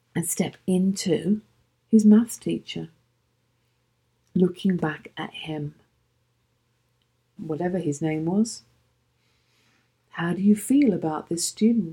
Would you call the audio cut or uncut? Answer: cut